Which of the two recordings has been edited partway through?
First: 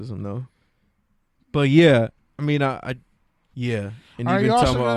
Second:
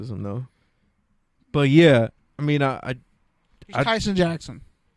first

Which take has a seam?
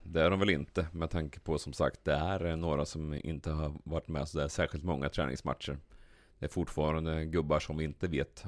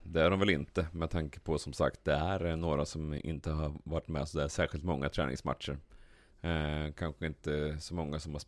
second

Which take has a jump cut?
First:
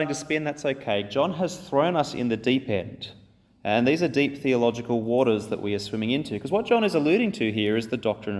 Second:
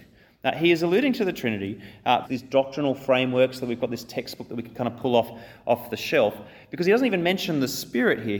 second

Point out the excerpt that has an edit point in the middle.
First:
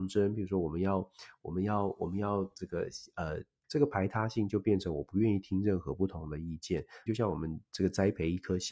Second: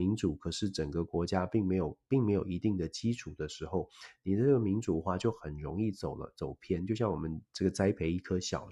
first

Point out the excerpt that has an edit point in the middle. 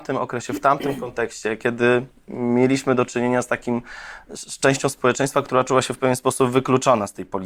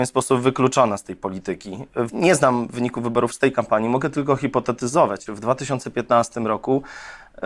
second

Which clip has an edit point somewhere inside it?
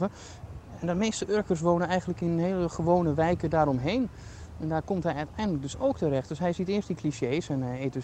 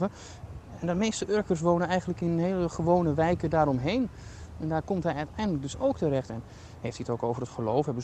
second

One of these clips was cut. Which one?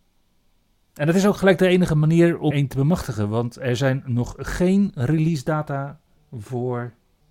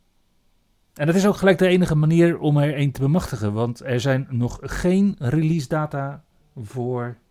first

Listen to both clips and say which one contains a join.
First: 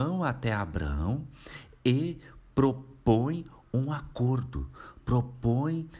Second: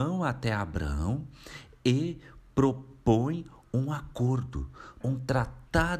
second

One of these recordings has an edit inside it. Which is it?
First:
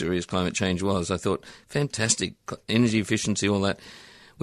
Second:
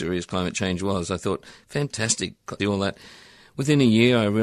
second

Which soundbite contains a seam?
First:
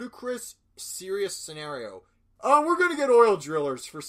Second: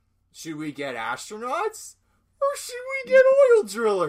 first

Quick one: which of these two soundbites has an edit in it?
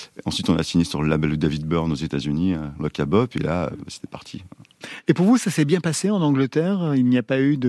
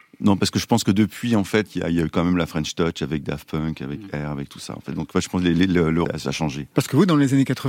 second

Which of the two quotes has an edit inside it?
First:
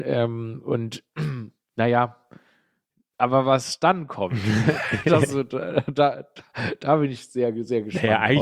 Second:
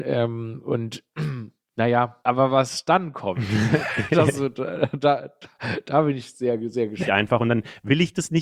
second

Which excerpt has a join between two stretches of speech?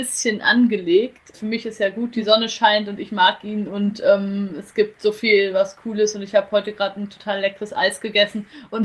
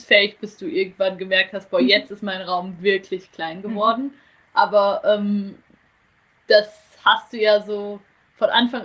first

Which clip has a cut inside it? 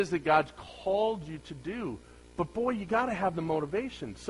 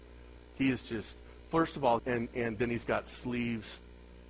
second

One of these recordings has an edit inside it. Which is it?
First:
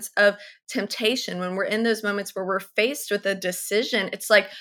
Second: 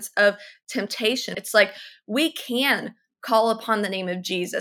second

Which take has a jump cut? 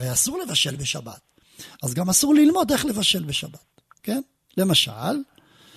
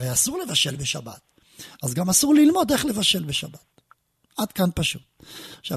first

